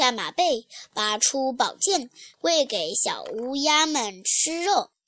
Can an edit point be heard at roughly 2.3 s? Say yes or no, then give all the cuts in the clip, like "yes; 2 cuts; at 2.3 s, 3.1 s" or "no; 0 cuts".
yes; 1 cut; at 2.3 s